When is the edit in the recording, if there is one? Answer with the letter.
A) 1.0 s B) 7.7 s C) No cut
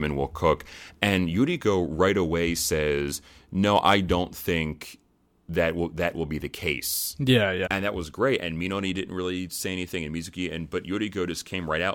B